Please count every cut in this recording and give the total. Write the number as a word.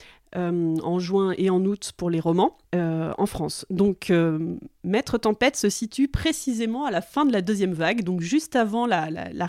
one